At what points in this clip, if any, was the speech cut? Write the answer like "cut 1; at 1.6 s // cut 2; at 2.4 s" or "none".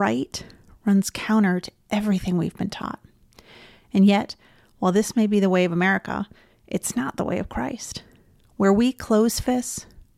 none